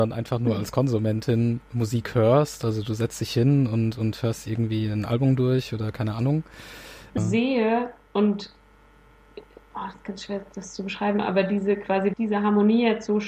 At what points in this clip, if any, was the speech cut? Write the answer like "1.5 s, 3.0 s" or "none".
7.2 s, 12.1 s